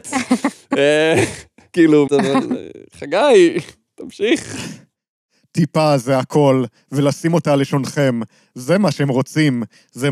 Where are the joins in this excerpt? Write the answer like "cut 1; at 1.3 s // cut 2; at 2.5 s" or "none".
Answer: cut 1; at 2.1 s